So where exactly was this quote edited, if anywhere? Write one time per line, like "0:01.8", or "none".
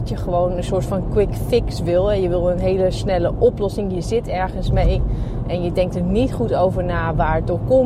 none

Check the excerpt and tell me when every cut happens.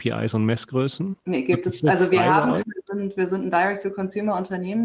0:01.2
0:02.6

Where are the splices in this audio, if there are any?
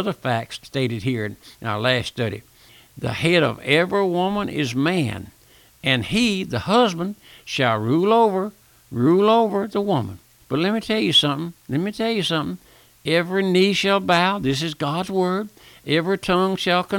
0:10.4

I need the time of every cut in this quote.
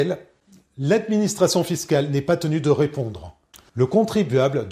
0:03.7

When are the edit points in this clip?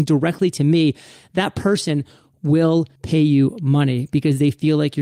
0:03.0

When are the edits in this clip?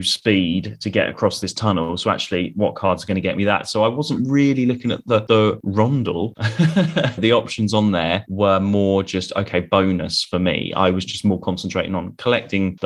0:07.2

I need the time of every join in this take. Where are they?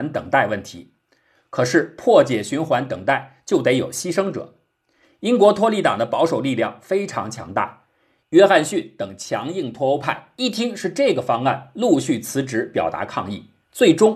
none

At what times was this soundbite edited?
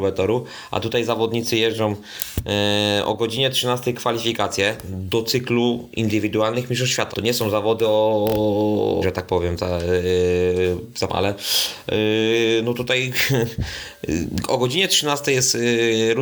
0:07.1
0:09.0
0:11.1

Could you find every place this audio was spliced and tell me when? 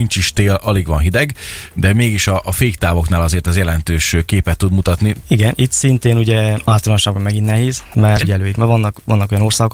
0:05.2
0:08.2

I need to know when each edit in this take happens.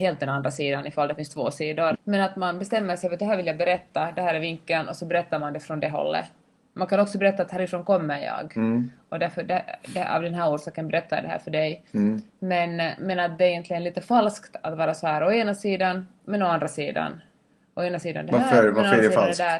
0:01.9

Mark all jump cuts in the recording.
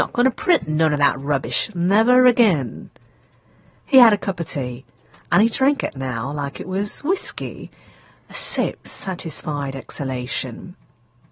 0:08.8

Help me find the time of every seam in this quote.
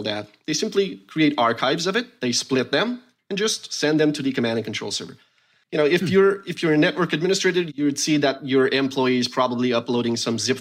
none

